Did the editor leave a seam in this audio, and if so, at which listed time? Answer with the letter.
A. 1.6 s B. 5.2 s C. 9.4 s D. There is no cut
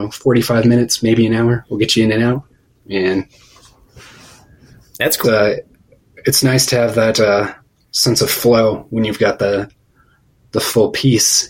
B